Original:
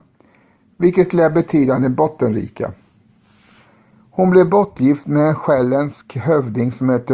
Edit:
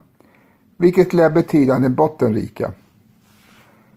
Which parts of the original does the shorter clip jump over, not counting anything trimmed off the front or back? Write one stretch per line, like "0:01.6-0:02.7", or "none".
none

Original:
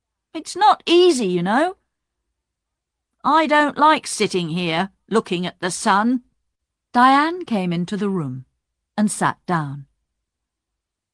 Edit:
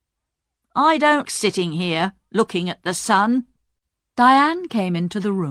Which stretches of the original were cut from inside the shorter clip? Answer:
0:03.7-0:04.0

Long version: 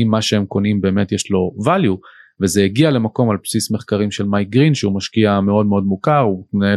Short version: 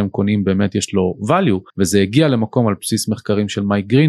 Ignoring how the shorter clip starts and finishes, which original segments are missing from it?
0:02.1-0:02.3

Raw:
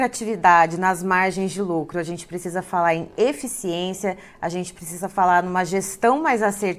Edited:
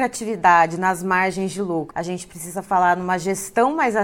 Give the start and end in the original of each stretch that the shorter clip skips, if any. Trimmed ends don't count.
0:01.9-0:04.4

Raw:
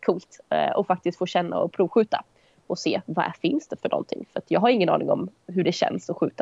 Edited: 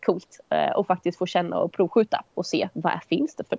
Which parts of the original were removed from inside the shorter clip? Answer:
0:02.3-0:02.6

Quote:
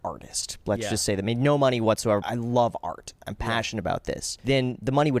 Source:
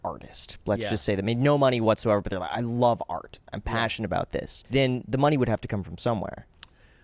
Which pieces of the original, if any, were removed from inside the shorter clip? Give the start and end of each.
0:02.2-0:02.5

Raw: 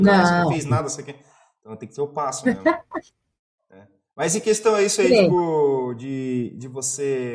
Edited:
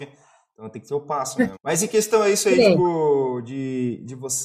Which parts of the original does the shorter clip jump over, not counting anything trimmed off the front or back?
0:02.6-0:04.1

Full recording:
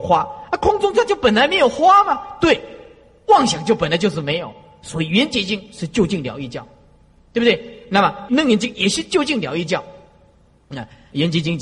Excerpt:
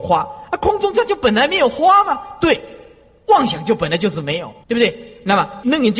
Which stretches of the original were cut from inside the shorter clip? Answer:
0:04.6-0:07.3

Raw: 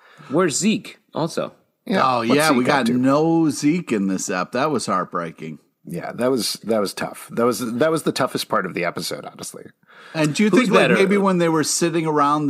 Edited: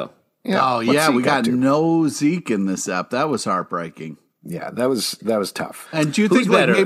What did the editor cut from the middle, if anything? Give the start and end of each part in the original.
0:07.3-0:10.1

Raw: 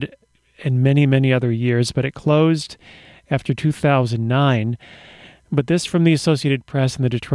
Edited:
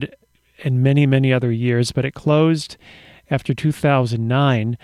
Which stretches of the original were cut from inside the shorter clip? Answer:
none

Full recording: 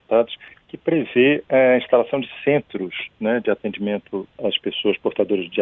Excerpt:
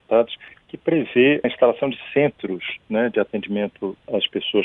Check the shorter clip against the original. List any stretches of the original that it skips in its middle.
0:01.4-0:01.8

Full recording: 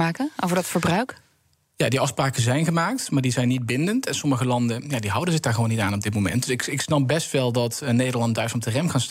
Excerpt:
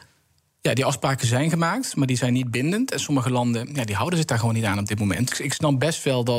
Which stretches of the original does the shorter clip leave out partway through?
0:06.5-0:06.6

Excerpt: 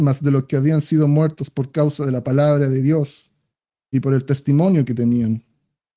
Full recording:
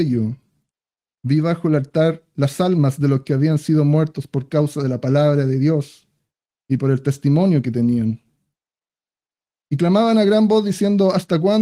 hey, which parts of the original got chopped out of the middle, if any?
none

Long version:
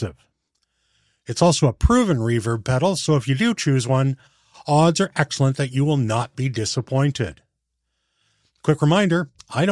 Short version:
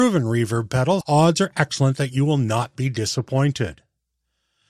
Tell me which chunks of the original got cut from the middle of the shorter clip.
0:03.0-0:04.6

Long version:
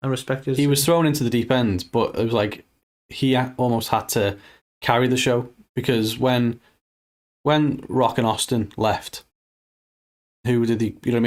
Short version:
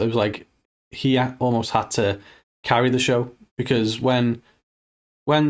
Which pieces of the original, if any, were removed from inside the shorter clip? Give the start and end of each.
none

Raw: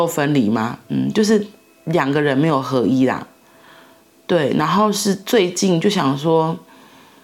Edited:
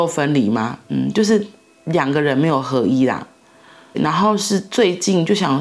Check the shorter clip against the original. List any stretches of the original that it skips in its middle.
0:03.9-0:04.5

